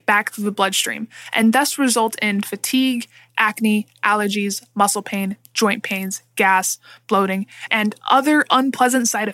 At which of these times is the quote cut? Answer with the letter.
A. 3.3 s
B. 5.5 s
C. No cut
A